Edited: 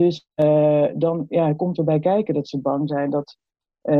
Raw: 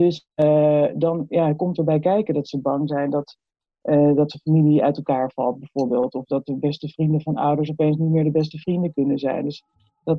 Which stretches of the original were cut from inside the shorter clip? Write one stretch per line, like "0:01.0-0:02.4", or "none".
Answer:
none